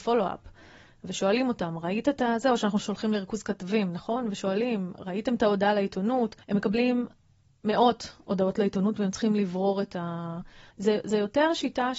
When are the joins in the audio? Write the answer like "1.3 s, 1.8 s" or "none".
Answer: 6.4 s, 10.7 s